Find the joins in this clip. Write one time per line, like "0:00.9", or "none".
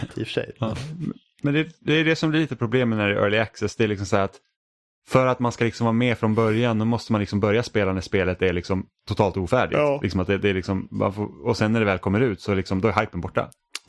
none